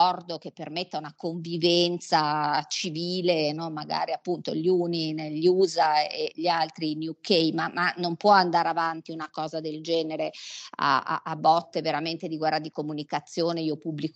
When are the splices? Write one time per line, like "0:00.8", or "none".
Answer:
none